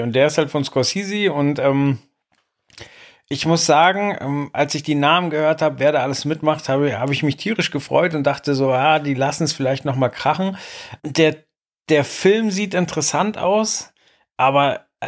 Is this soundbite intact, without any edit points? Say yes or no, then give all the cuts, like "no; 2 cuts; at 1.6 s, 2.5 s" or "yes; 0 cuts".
yes; 0 cuts